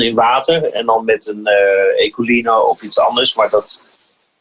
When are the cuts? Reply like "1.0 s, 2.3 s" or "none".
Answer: none